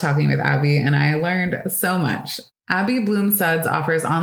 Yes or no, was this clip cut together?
yes